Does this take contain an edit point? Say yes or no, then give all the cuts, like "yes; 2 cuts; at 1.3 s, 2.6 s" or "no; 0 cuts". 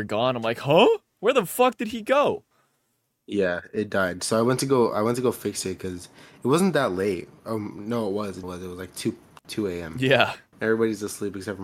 yes; 2 cuts; at 8.4 s, 10.5 s